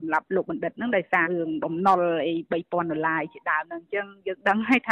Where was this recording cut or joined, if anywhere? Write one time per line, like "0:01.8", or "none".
0:01.2